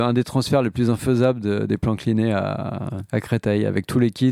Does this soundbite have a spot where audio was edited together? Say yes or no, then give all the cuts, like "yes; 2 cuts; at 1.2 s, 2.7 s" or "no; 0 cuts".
no; 0 cuts